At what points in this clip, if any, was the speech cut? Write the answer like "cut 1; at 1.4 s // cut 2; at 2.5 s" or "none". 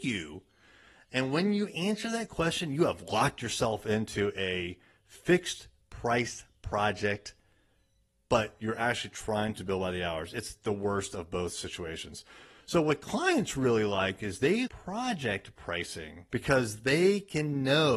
cut 1; at 14.7 s // cut 2; at 16.3 s